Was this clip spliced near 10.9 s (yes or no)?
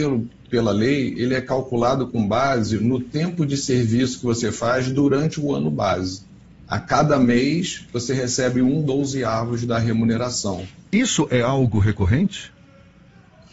yes